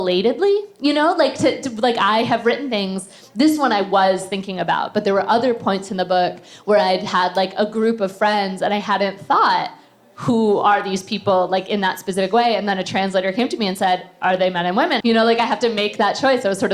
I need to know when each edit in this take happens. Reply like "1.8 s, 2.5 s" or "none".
15.0 s